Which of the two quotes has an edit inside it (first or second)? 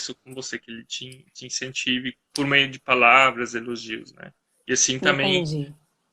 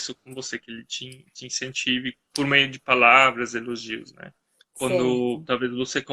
second